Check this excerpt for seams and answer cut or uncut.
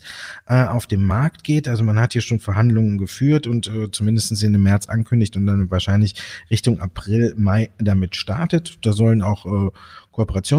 uncut